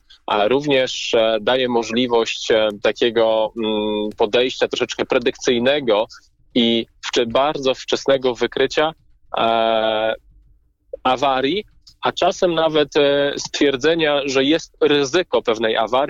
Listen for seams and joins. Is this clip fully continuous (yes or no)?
yes